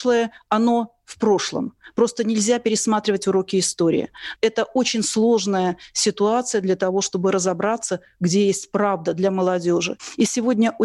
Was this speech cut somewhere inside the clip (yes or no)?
yes